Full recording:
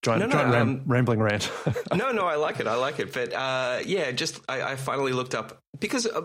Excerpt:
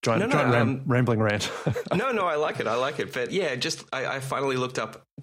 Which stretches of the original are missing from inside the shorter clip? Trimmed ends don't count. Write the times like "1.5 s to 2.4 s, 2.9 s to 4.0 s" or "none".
3.3 s to 3.8 s